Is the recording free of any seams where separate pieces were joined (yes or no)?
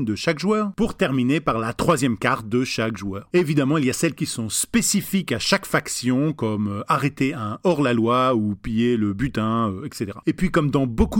no